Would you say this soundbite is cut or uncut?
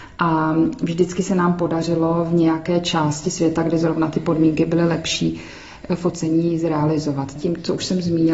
cut